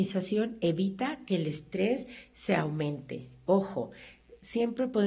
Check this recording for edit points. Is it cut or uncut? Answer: uncut